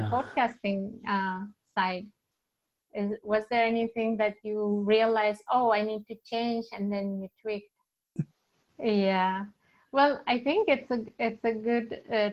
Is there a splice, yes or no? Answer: yes